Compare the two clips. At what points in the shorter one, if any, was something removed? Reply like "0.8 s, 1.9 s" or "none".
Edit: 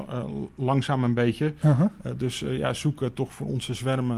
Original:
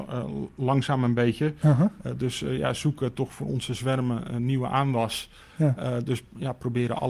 none